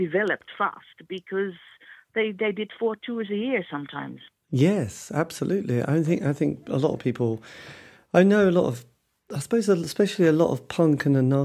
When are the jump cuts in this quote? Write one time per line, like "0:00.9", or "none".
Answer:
none